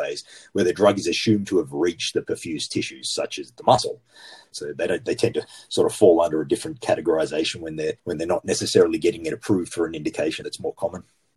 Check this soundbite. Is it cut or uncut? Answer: cut